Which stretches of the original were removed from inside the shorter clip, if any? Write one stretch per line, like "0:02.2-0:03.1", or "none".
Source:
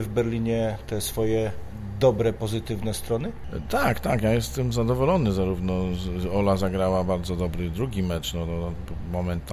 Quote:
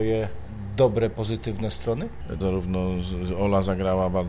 0:03.6-0:05.3